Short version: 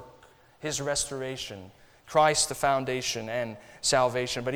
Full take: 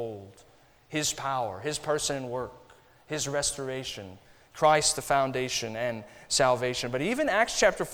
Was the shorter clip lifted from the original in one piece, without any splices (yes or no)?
yes